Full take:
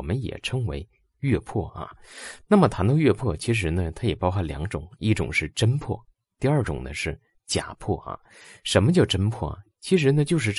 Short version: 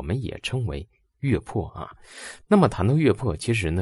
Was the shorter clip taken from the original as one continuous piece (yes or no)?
yes